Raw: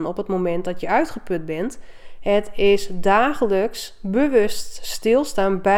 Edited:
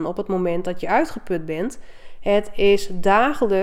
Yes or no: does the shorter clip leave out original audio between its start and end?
no